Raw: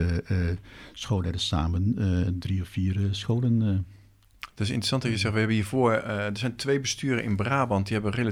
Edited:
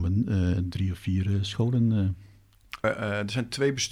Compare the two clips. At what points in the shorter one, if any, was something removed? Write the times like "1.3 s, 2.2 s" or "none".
2.8 s